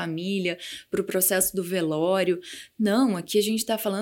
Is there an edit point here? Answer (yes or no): no